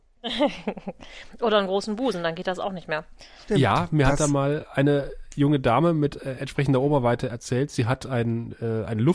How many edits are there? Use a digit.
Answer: 0